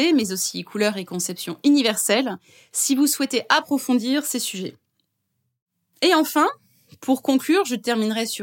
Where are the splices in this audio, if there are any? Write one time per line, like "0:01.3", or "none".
none